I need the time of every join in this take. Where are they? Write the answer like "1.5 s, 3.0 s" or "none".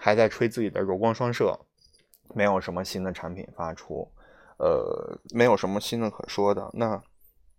5.3 s